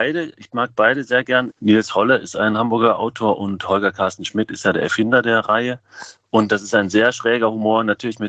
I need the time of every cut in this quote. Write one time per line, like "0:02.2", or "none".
0:01.5